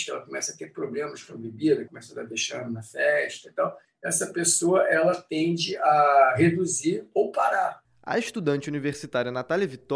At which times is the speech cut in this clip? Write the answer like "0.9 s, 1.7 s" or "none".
1.9 s, 7.8 s